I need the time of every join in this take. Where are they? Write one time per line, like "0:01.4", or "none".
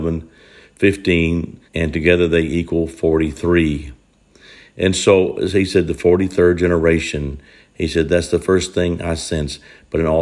0:01.7